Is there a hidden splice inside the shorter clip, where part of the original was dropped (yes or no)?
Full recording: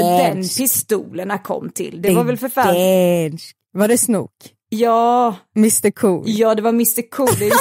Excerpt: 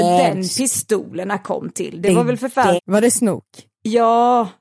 yes